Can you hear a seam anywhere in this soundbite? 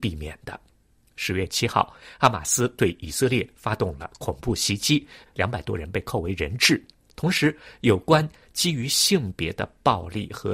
yes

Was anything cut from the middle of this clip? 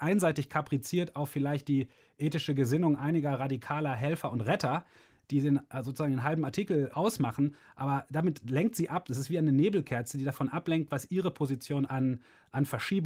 yes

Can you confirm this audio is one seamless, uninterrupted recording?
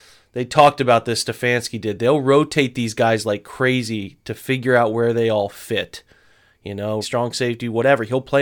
no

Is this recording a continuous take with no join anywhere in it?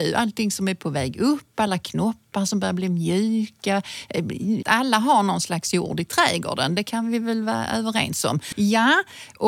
no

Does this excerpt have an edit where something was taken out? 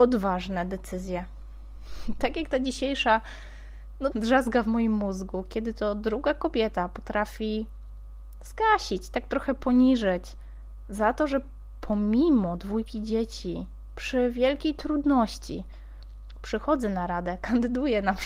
yes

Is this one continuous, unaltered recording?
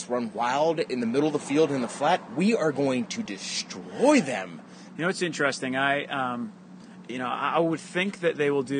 no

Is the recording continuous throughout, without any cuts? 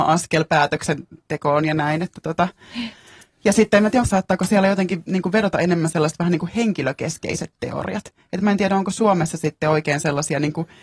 no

